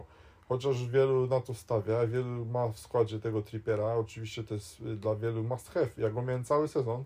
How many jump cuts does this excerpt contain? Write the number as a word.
zero